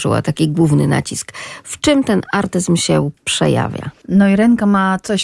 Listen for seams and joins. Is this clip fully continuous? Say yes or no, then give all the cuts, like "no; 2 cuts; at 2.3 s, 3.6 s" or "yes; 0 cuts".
yes; 0 cuts